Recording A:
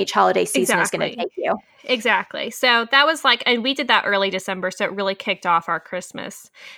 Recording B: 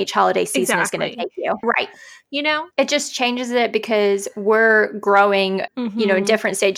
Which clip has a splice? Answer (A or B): B